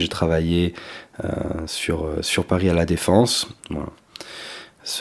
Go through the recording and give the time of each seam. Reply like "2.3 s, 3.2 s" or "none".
3.6 s